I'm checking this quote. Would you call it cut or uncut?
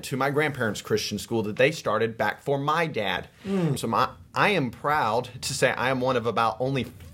cut